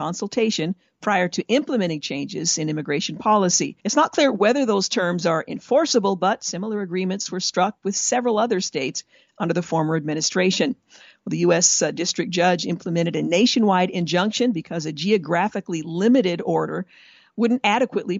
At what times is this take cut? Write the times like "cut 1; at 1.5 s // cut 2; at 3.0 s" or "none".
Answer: cut 1; at 3.8 s

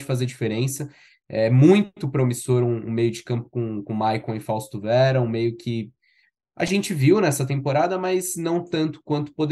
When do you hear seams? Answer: none

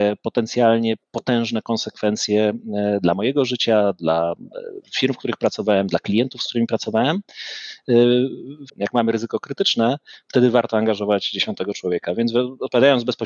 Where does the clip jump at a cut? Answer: cut 1; at 8.7 s

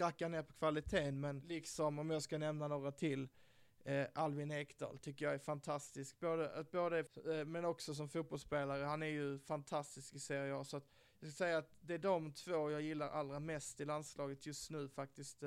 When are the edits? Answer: cut 1; at 7.1 s

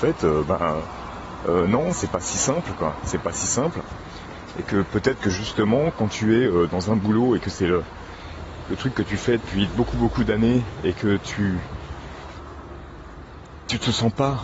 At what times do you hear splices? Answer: none

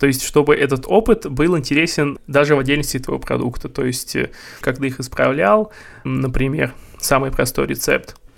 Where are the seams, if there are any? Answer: cut 1; at 4.6 s

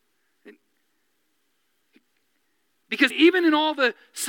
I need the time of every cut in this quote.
cut 1; at 3.1 s

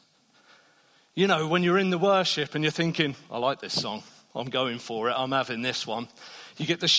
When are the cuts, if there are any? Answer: none

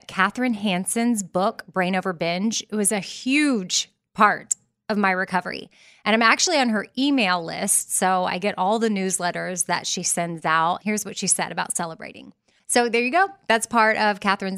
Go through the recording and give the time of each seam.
cut 1; at 10.8 s // cut 2; at 12.6 s

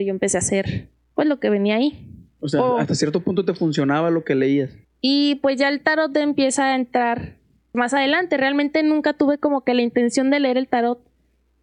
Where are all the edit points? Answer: cut 1; at 4.8 s // cut 2; at 7.7 s

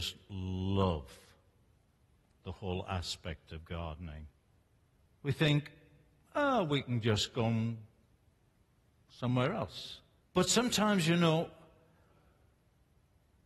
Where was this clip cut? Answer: cut 1; at 5.1 s // cut 2; at 10.2 s

